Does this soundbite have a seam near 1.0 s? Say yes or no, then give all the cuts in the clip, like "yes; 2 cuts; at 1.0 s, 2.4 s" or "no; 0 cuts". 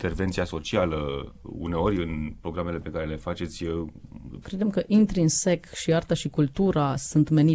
no; 1 cut; at 4.4 s